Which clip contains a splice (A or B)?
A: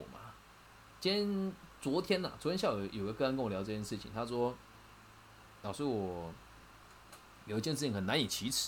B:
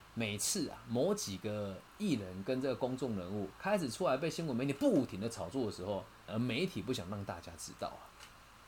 B